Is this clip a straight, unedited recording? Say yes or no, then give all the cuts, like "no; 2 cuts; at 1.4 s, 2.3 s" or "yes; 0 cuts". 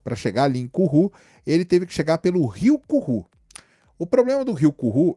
yes; 0 cuts